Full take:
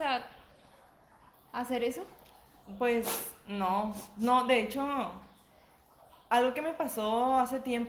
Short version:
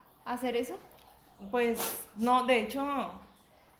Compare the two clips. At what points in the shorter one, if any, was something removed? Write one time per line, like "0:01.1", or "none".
0:02.1